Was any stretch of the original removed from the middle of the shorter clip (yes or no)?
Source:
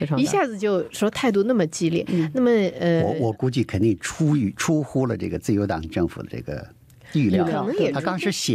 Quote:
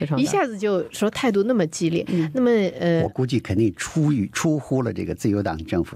yes